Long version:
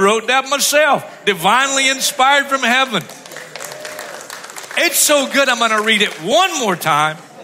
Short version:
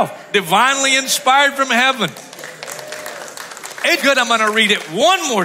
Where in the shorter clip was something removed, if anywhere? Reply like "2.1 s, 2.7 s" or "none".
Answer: 4.0 s